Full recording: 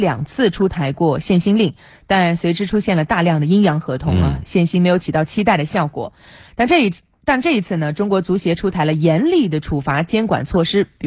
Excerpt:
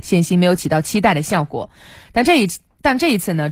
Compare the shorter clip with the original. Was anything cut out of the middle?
no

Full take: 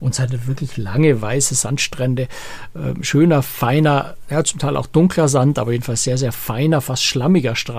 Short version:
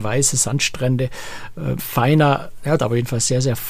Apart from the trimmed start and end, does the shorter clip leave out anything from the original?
yes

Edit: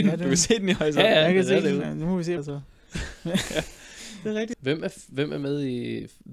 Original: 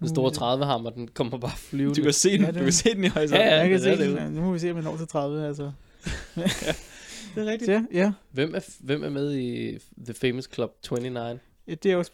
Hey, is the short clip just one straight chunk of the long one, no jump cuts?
no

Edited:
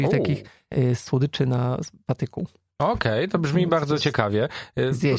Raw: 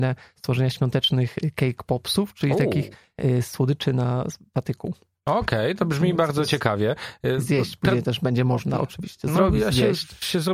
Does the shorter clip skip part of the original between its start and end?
no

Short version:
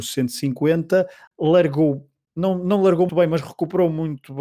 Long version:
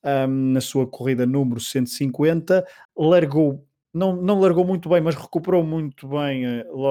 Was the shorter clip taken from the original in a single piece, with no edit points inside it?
no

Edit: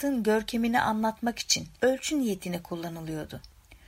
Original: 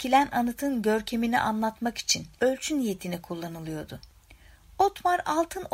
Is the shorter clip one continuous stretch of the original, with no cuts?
yes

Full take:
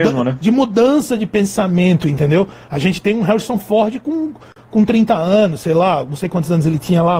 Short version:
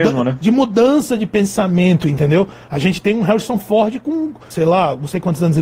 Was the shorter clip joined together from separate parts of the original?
yes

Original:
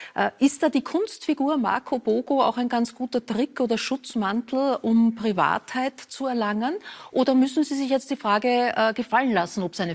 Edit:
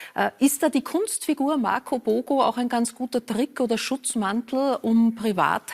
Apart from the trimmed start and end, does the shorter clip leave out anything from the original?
no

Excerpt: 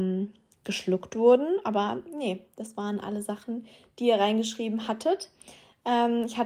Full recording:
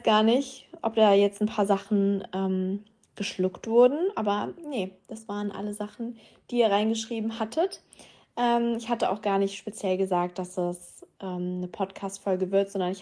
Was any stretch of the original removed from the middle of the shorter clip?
no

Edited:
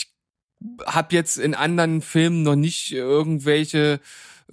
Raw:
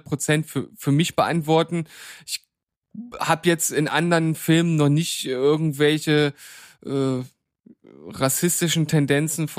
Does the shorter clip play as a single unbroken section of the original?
yes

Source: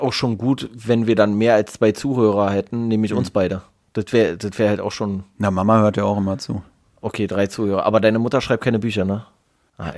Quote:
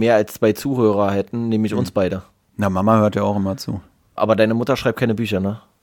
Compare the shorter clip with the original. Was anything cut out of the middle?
yes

